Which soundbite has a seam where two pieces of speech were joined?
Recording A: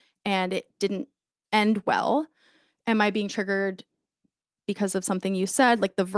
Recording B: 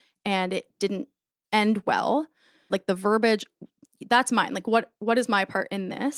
B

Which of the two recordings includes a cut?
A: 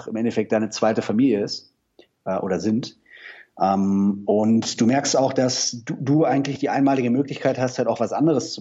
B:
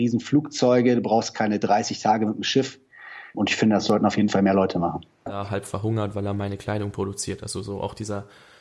B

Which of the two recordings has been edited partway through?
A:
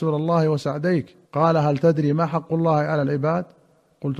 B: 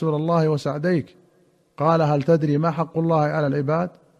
A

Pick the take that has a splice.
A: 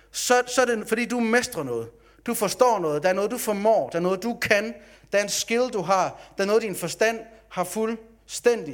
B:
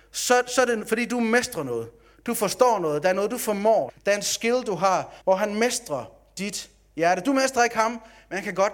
B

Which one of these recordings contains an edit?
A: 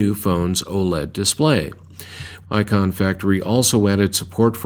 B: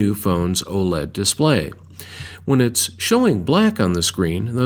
A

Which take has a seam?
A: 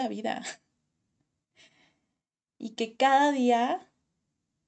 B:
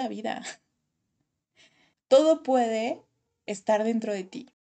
B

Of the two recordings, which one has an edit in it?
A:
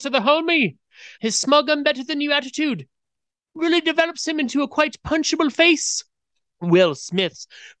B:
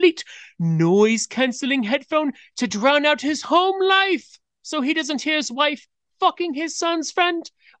A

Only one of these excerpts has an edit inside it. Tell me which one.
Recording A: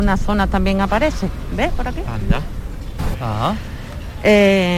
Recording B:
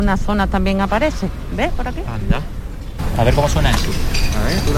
A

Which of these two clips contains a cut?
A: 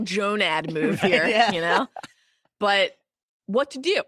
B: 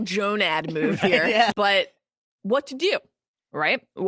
B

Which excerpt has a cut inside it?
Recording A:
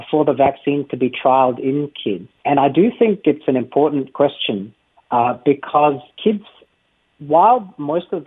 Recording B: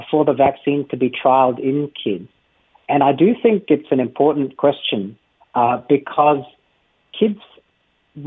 A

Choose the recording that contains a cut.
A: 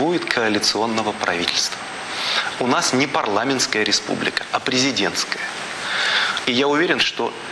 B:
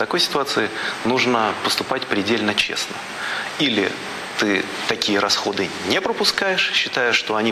A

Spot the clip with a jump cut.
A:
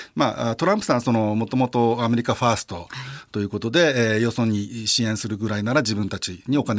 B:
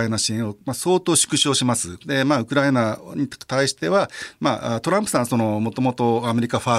B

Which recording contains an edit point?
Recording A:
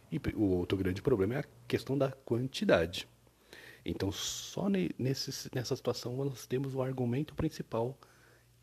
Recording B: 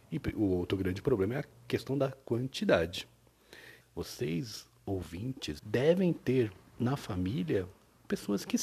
B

